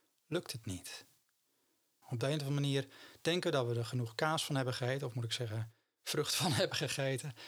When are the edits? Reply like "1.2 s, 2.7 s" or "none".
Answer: 2.0 s